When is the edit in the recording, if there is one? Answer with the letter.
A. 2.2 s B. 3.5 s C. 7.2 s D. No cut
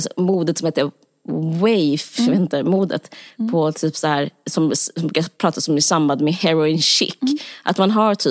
A